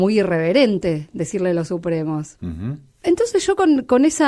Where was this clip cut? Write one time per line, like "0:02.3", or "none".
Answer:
0:02.4